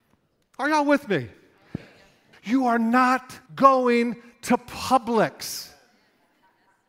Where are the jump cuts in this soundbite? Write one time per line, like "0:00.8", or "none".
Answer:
0:02.3
0:03.5